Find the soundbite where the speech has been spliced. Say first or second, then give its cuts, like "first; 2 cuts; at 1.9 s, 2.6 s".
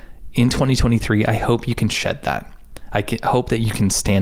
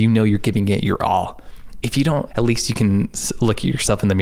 second; 1 cut; at 2.3 s